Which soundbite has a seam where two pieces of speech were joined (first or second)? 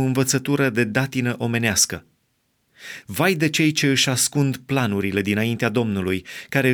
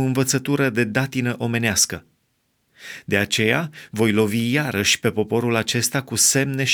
first